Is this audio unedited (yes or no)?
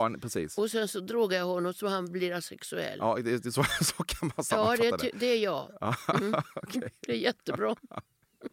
yes